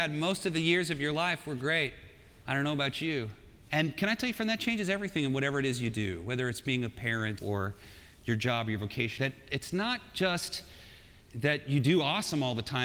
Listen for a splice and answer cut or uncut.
cut